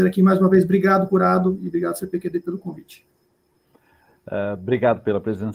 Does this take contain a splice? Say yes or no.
no